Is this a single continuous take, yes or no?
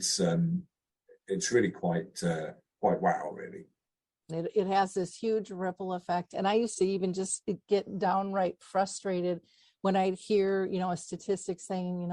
no